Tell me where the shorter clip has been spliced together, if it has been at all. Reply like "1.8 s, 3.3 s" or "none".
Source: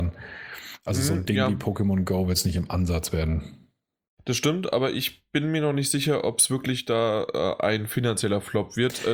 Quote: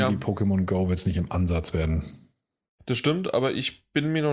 none